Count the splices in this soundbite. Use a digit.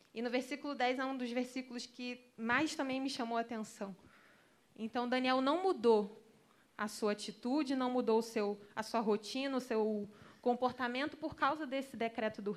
1